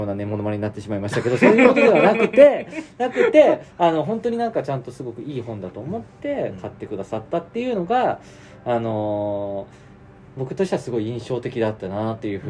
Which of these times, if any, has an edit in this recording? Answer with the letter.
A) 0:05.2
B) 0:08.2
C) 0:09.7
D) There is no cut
D